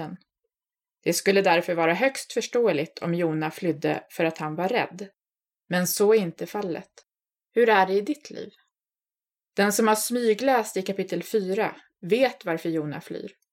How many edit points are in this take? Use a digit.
2